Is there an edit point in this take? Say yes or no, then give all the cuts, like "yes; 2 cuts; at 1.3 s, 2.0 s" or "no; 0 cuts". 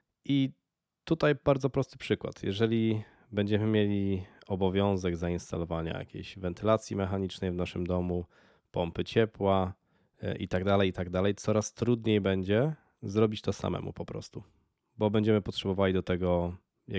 no; 0 cuts